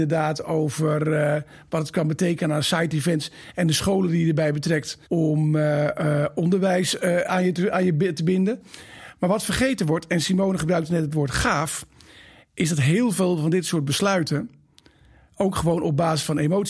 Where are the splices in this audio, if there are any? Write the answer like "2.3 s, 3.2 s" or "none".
5.1 s